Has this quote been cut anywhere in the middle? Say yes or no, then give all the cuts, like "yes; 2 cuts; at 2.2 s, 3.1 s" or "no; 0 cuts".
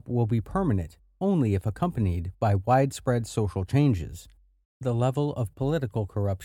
yes; 1 cut; at 4.6 s